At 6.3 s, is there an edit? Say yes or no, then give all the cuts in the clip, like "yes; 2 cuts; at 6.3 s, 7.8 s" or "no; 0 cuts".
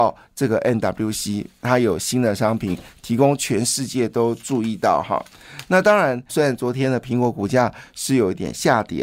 yes; 1 cut; at 6.3 s